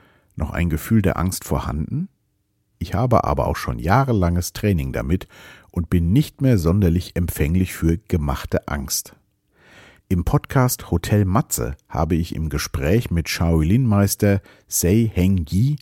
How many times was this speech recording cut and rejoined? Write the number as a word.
one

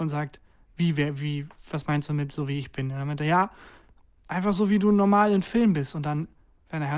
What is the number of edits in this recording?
zero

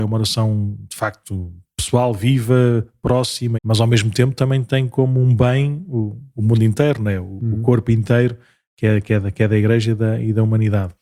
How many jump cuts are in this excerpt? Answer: one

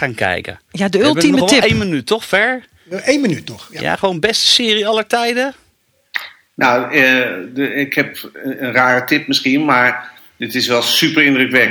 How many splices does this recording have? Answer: zero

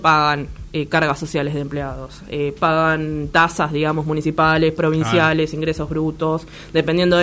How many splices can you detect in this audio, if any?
zero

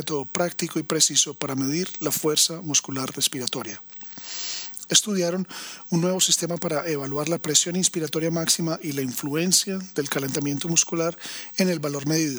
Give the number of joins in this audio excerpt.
one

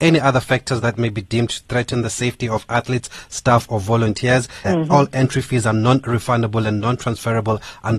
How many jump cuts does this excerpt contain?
one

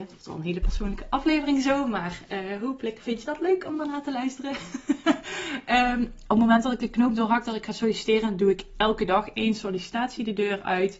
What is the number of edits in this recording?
zero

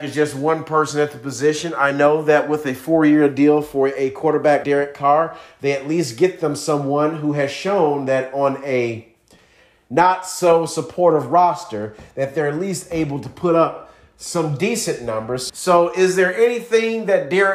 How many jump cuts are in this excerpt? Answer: two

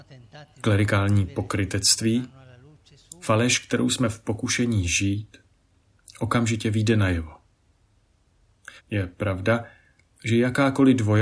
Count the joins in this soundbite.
one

